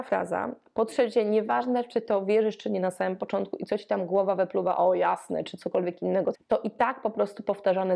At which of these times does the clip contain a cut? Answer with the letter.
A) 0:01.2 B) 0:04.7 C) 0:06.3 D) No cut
C